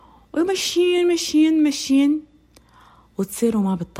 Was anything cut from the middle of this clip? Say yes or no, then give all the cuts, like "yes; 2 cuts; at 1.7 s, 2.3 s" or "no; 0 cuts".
no; 0 cuts